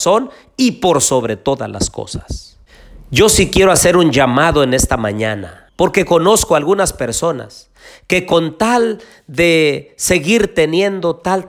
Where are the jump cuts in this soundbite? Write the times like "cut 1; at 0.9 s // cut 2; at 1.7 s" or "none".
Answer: cut 1; at 5.7 s